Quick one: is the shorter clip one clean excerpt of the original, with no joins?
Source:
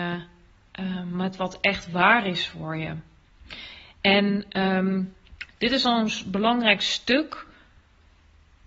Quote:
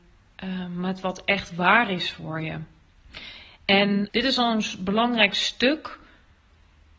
no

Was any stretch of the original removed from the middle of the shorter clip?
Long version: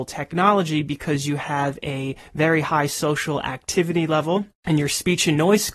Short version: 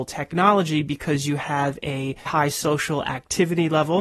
yes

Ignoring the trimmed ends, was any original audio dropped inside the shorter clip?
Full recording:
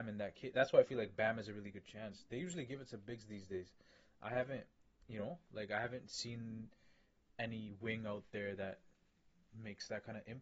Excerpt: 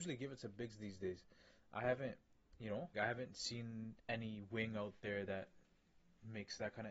yes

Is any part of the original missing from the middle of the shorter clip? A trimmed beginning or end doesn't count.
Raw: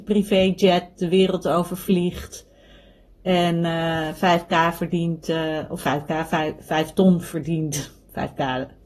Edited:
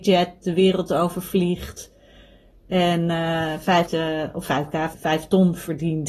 yes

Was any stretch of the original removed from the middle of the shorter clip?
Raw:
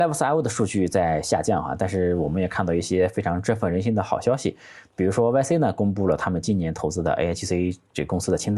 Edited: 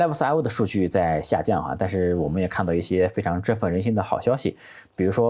no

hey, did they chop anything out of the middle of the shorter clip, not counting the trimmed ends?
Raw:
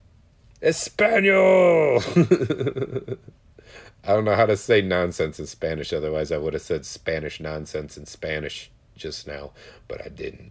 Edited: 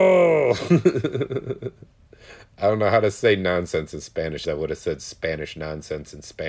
yes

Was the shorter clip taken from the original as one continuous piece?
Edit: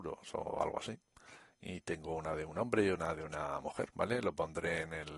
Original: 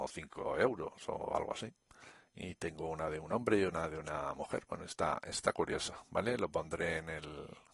no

